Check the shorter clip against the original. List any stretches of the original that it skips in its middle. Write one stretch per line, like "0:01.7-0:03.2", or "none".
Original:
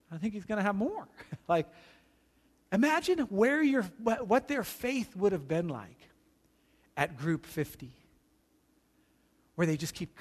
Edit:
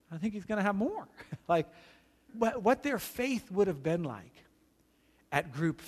0:02.3-0:03.9